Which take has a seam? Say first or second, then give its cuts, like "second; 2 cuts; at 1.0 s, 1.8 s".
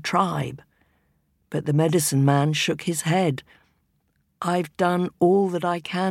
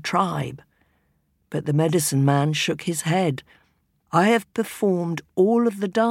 second; 1 cut; at 4.1 s